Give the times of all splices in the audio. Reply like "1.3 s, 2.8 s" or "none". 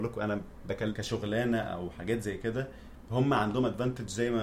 0.9 s